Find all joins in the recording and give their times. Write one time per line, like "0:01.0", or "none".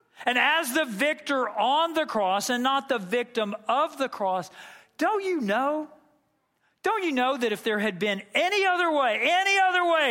none